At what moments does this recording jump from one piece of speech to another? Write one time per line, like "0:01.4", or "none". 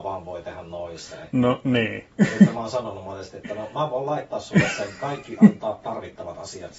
none